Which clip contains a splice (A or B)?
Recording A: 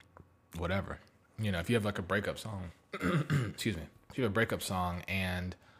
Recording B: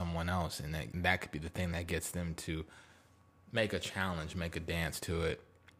B